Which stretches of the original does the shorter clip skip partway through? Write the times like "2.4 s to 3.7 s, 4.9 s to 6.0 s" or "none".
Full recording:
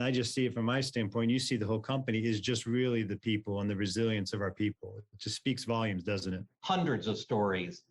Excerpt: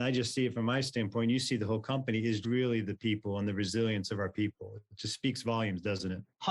2.4 s to 2.6 s